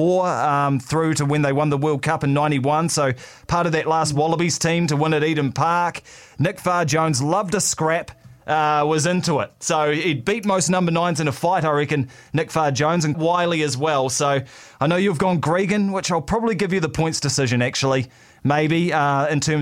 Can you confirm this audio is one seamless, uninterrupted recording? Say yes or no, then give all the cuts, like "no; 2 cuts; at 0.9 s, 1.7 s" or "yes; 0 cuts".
no; 1 cut; at 13.1 s